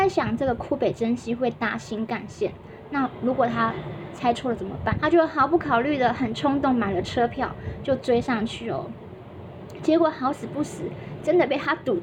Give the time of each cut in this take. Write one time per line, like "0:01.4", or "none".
0:04.9